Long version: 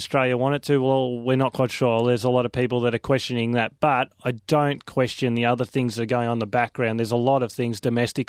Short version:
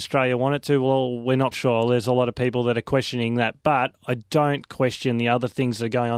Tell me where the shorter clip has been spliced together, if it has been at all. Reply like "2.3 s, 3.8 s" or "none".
1.5 s